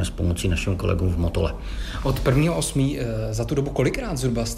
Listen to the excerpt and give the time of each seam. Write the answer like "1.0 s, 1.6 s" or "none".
none